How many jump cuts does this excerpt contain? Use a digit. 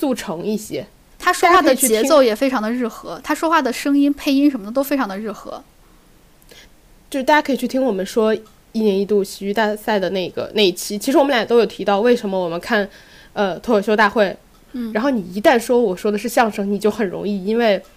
2